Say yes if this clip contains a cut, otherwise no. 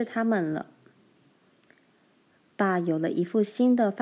yes